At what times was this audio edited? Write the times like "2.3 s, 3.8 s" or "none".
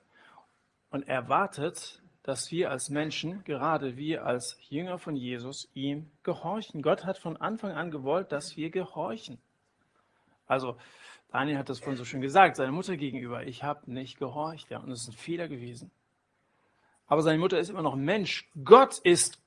none